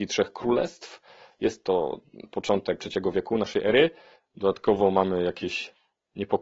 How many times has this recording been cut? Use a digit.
2